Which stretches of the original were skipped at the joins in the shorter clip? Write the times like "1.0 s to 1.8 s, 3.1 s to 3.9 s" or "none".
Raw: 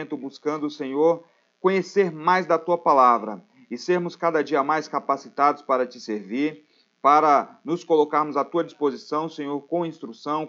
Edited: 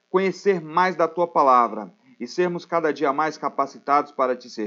none